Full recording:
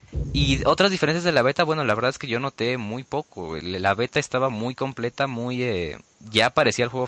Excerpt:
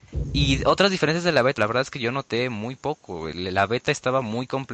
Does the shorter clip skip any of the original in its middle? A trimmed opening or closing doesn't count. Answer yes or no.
yes